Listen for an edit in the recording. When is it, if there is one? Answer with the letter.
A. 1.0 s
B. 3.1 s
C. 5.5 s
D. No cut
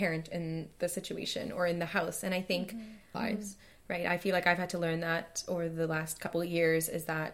B